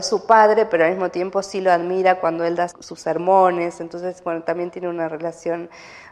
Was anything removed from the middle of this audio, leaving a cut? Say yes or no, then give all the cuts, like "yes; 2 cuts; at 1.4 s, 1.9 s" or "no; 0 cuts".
yes; 1 cut; at 2.7 s